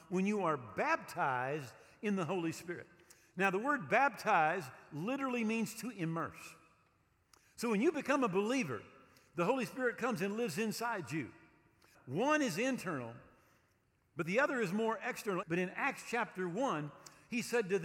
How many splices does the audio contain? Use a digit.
2